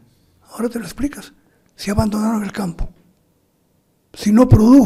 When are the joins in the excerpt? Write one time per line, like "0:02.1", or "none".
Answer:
none